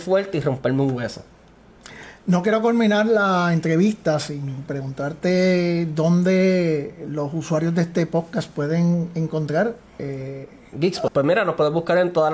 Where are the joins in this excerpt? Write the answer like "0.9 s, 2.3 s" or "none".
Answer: 11.1 s